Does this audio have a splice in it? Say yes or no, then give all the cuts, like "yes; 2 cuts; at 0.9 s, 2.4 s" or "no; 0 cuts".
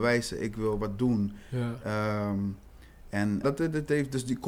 yes; 1 cut; at 3.4 s